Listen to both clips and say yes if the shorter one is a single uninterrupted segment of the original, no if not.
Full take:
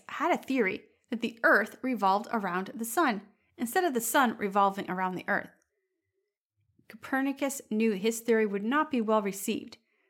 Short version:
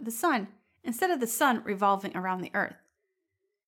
yes